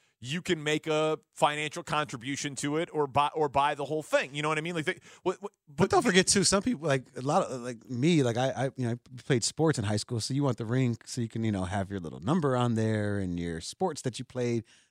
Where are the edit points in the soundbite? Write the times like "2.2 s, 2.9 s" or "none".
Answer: none